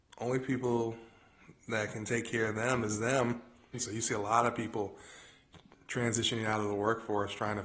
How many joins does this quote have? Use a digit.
1